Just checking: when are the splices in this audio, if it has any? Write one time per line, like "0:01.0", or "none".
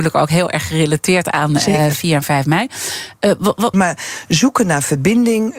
0:03.7